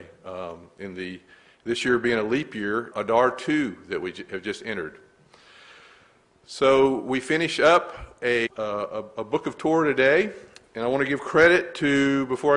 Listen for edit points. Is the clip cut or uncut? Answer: cut